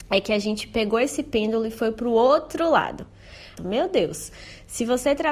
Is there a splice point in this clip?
yes; 1 cut; at 3.6 s

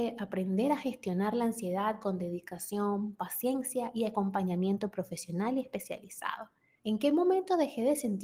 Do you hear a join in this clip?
yes; 1 cut; at 6.8 s

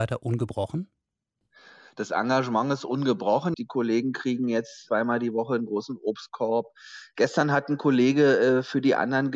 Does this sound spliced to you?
yes; 1 cut; at 3.5 s

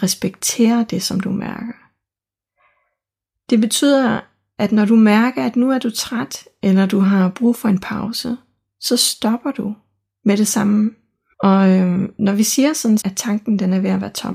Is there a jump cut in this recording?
yes; 2 cuts; at 11.3 s, 13.0 s

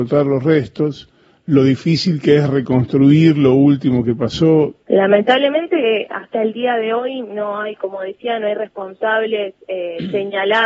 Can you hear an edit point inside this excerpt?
yes; 1 cut; at 4.8 s

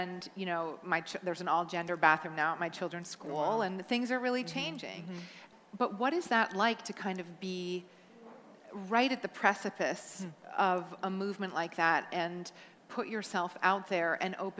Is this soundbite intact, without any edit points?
yes; 0 cuts

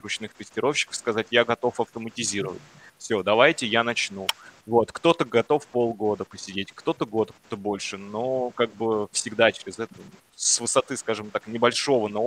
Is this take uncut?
no; 1 cut; at 10.3 s

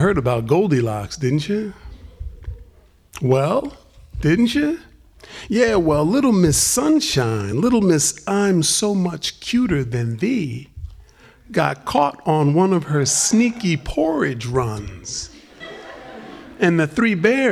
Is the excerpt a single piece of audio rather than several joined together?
yes; 0 cuts

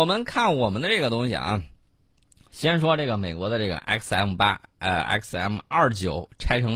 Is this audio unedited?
yes; 0 cuts

